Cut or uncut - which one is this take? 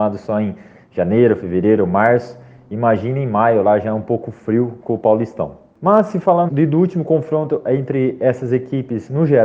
cut